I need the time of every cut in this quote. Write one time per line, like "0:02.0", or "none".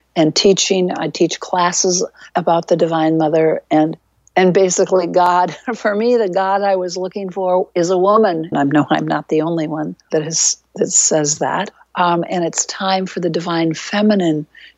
0:08.5